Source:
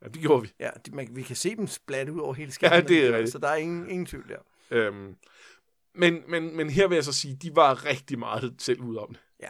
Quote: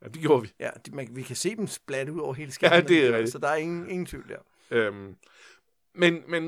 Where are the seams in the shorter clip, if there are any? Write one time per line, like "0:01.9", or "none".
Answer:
none